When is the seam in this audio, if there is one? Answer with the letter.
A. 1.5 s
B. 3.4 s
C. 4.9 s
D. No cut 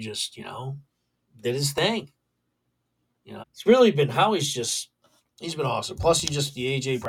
B